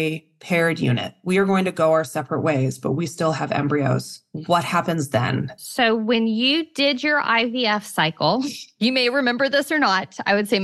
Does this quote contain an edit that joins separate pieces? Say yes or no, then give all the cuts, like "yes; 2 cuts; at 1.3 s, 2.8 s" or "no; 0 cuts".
no; 0 cuts